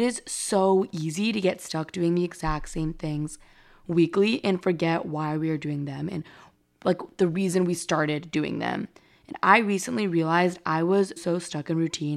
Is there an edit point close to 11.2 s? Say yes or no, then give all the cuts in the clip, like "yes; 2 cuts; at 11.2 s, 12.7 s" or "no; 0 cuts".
yes; 1 cut; at 11.2 s